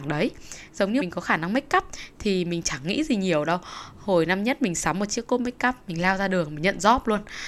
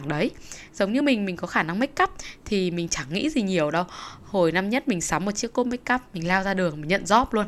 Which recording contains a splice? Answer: first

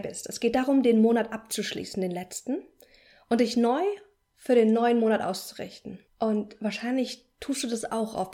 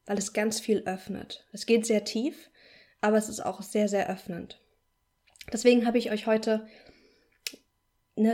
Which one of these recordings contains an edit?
first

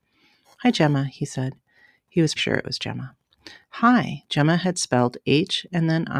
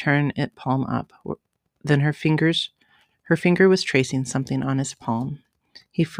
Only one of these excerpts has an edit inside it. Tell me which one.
first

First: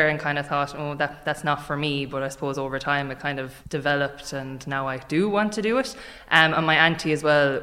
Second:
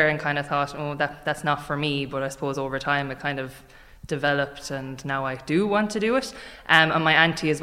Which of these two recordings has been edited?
first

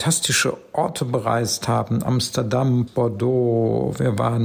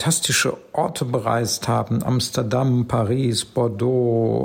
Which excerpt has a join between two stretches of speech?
first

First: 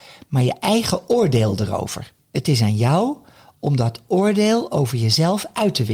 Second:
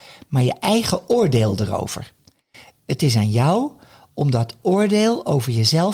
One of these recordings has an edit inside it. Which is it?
first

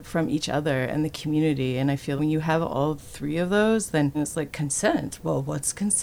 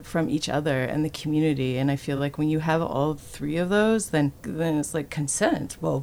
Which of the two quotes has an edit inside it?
first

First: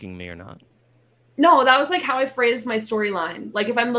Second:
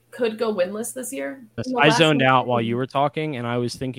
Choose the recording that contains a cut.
second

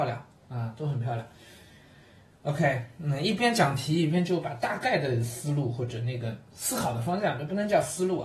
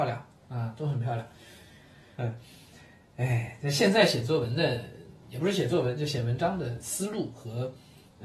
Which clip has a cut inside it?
second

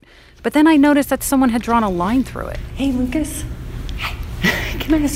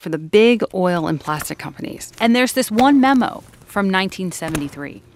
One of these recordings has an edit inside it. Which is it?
second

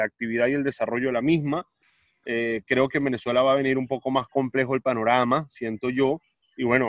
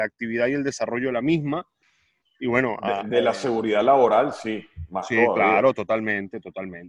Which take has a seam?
second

